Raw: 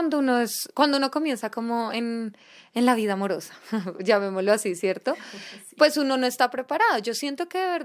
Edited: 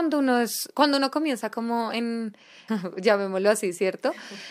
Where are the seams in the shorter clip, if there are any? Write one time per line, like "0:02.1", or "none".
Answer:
0:02.7